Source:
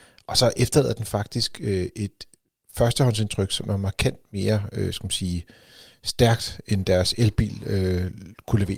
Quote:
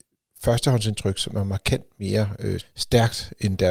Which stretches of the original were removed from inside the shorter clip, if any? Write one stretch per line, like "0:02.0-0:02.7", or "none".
0:04.9-0:05.9